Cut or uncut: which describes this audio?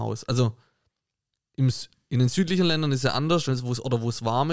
uncut